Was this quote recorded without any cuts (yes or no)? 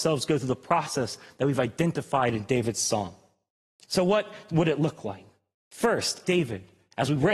no